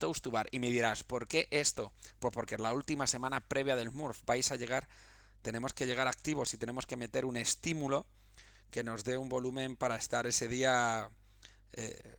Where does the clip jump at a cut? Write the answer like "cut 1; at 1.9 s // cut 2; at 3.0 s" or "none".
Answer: none